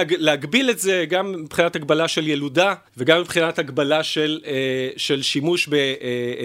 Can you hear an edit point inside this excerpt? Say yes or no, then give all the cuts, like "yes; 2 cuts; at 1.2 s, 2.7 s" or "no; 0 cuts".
yes; 1 cut; at 2.9 s